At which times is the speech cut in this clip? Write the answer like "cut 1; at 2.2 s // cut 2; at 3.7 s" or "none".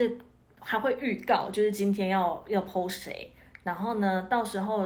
none